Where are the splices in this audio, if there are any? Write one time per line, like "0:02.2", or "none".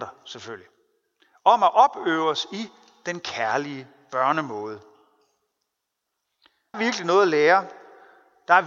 0:06.7